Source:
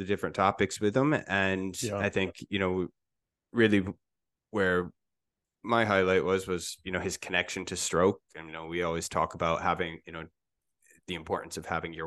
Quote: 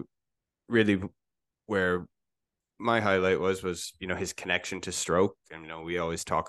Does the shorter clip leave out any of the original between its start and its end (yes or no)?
no